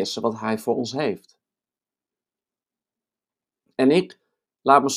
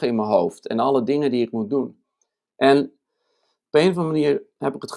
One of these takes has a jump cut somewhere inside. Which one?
second; 1 cut; at 2.5 s

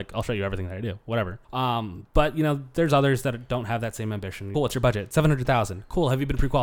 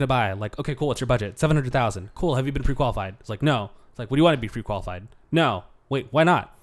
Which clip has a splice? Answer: first; 2 cuts; at 1.4 s, 4.5 s

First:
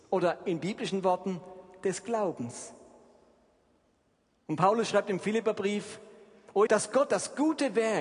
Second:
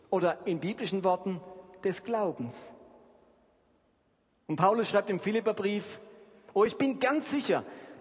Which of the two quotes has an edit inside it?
first; 1 cut; at 6.7 s

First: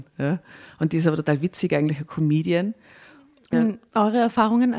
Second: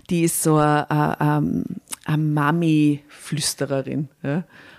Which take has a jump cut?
first; 1 cut; at 3.5 s

